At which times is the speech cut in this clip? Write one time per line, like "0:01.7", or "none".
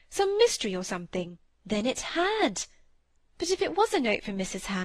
0:01.6